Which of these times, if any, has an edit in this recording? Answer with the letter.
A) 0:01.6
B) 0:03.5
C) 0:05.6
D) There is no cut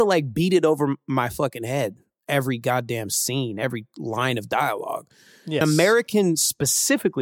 C